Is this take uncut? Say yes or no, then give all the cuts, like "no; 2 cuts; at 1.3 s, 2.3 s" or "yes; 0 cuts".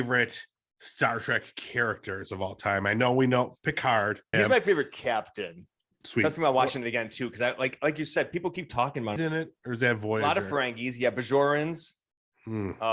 no; 3 cuts; at 4.3 s, 5.9 s, 9.2 s